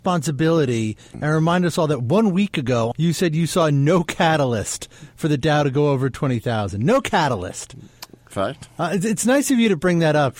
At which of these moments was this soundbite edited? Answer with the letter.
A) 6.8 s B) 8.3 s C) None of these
B